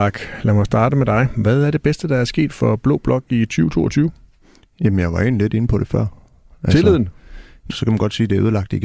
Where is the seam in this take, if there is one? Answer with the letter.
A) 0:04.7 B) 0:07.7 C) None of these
B